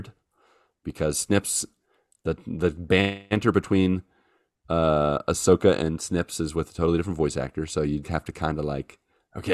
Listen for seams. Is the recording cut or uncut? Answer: cut